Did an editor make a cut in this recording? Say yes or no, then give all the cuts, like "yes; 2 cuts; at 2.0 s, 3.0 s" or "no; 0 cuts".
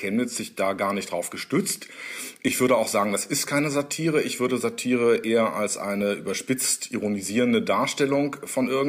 no; 0 cuts